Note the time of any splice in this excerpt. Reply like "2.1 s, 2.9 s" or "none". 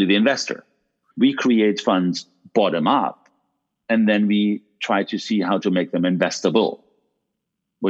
1.1 s